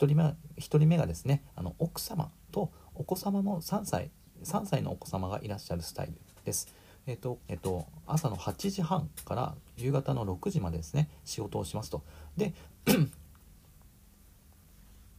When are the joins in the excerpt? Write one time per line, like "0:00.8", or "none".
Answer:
0:07.4